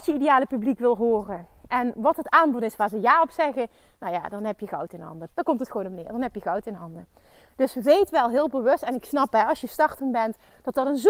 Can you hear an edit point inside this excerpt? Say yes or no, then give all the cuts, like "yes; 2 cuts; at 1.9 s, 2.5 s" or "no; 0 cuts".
yes; 1 cut; at 5.3 s